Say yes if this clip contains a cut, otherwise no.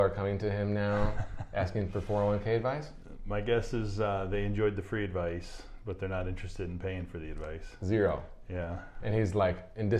no